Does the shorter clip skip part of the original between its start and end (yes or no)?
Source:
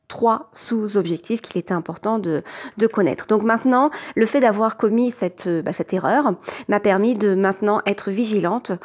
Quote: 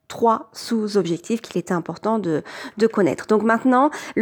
no